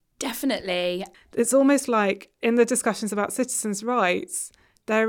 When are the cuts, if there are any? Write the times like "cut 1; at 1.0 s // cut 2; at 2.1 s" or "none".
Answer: cut 1; at 1.1 s